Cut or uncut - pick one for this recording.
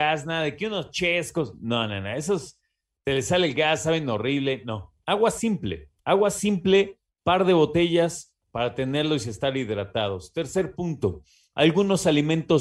cut